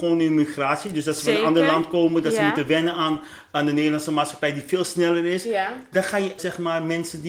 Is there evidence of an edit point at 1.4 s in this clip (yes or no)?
no